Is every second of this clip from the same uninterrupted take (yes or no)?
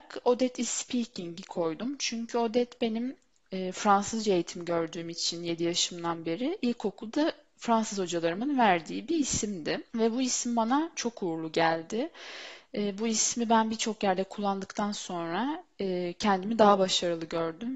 no